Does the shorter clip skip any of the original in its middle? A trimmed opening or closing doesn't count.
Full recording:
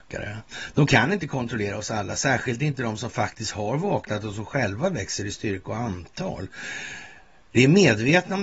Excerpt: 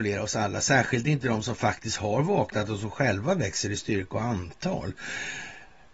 no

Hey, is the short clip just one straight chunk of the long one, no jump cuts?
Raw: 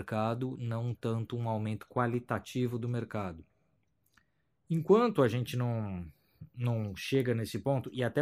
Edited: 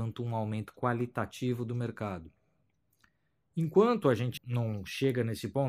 no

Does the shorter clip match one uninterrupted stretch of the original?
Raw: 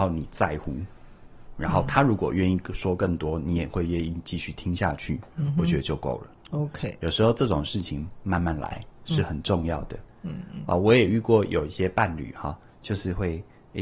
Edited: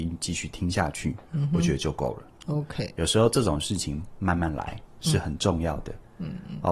yes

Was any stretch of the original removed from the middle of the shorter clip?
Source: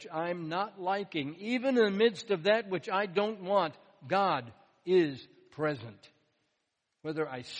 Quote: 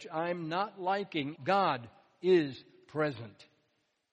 yes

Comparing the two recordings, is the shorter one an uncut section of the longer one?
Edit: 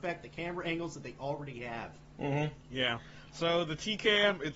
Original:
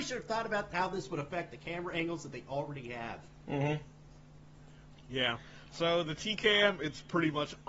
no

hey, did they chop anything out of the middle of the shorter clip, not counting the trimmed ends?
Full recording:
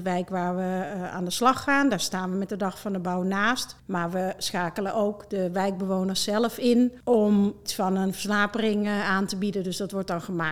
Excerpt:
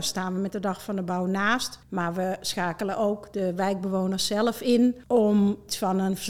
no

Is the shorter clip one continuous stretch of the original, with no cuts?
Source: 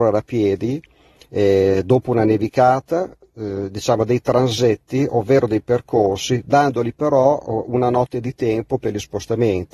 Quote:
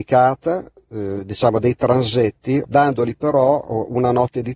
no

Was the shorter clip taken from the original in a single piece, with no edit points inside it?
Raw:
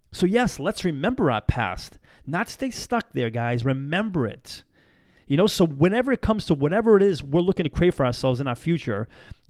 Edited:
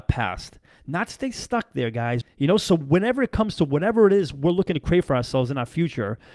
no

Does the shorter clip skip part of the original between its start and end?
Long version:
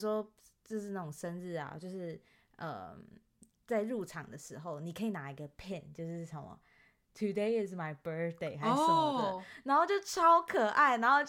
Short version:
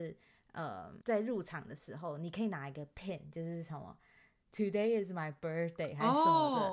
yes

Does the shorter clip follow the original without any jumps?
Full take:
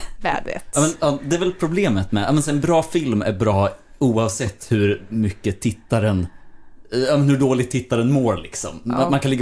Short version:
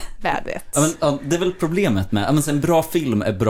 yes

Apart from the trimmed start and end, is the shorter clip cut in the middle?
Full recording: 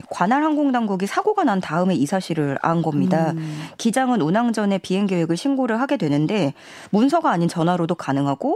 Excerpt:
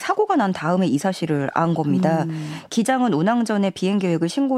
no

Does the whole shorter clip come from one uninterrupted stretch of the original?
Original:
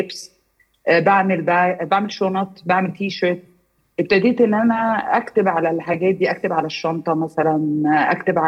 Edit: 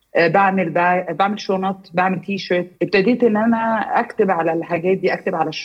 no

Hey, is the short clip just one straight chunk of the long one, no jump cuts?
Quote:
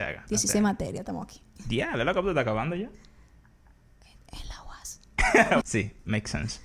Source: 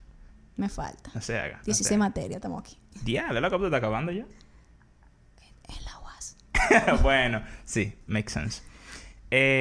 no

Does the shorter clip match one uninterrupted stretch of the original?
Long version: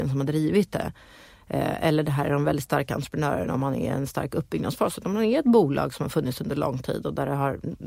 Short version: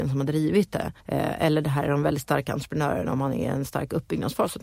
no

